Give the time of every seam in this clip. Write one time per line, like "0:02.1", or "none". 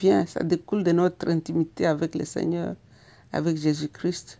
none

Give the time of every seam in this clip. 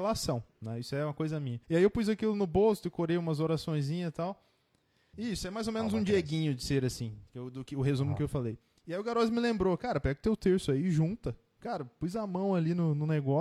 0:01.6
0:05.1

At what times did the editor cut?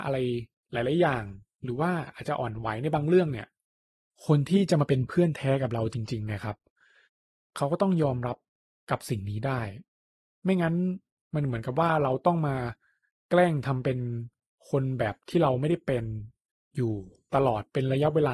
none

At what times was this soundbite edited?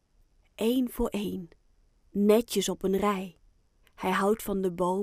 0:03.8

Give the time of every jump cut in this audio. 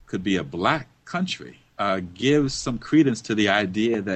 0:01.7

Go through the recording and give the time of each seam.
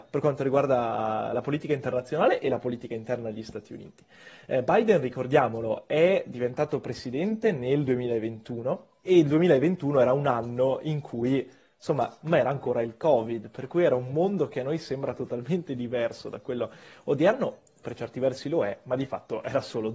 0:12.2

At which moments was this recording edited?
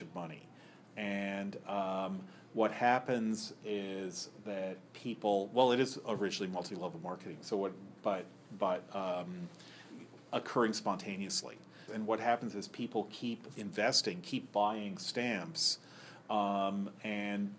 0:11.9

